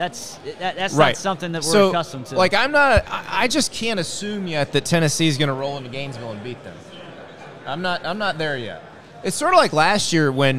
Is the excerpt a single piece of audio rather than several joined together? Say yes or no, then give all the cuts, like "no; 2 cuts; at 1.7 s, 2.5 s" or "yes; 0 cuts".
yes; 0 cuts